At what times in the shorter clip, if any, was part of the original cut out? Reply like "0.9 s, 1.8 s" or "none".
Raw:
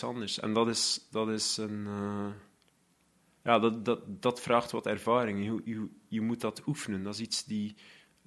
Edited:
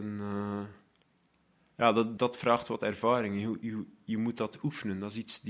2.2 s